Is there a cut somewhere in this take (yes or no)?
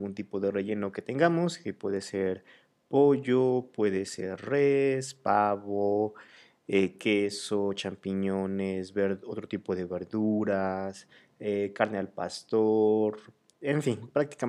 no